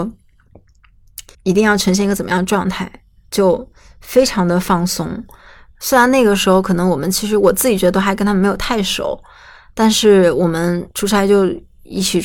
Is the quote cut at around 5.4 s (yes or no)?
no